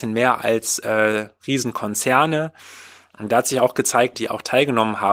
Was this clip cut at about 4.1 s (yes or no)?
yes